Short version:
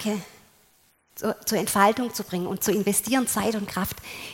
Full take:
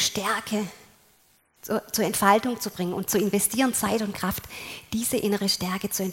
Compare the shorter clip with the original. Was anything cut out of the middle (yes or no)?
no